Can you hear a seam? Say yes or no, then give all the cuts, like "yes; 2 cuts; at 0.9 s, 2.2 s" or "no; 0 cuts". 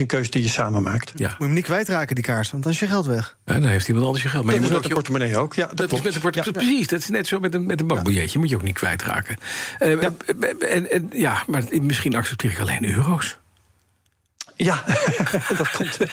no; 0 cuts